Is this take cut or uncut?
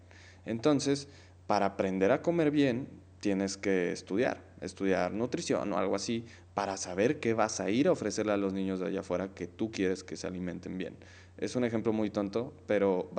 uncut